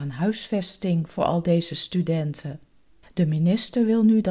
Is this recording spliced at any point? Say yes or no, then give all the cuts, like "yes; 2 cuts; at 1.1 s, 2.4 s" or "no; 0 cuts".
yes; 1 cut; at 3.0 s